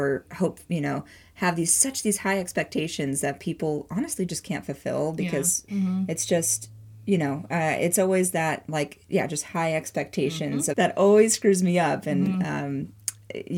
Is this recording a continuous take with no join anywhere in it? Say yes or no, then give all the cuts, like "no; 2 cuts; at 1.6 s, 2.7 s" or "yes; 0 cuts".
no; 2 cuts; at 5.7 s, 10.7 s